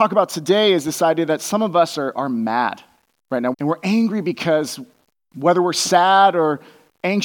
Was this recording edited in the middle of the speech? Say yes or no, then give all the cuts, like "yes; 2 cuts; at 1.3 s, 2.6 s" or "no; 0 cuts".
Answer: yes; 1 cut; at 3.5 s